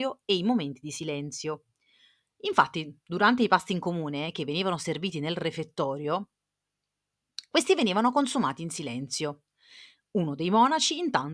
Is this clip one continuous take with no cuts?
yes; 0 cuts

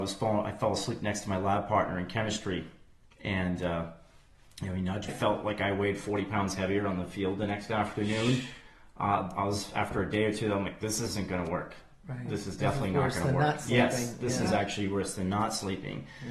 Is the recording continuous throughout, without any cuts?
no; 1 cut; at 5.1 s

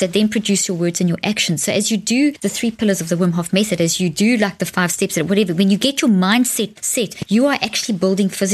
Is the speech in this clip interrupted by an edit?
no; 0 cuts

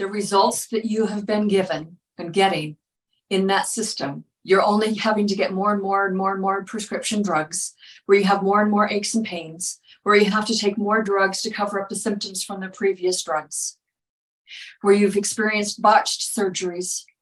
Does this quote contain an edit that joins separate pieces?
yes; 1 cut; at 4.4 s

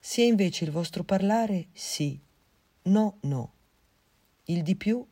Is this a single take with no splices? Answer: no; 1 cut; at 1.7 s

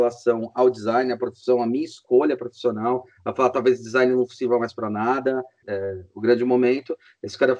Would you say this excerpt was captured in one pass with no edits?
no; 1 cut; at 5.6 s

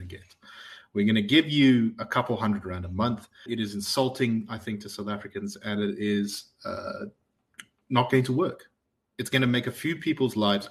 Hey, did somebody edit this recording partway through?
yes; 1 cut; at 3.5 s

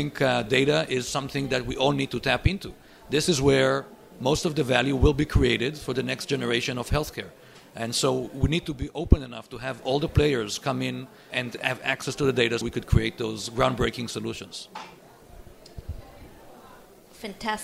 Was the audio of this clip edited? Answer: yes; 2 cuts; at 11.3 s, 12.6 s

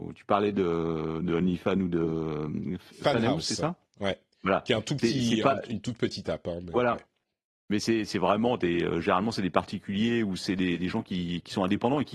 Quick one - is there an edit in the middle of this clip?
no; 0 cuts

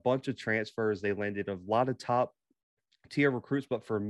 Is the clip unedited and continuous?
yes; 0 cuts

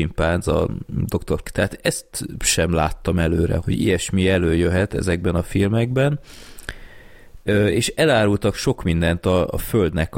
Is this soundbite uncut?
no; 2 cuts; at 1.4 s, 3.6 s

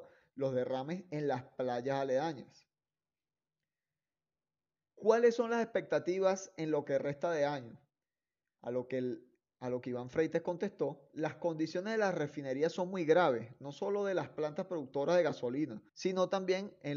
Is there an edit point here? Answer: yes; 1 cut; at 15.9 s

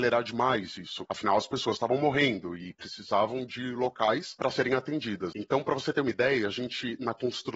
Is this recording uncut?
no; 1 cut; at 5.3 s

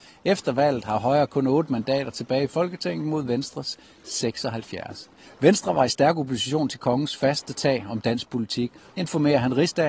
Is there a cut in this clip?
yes; 2 cuts; at 5.2 s, 8.9 s

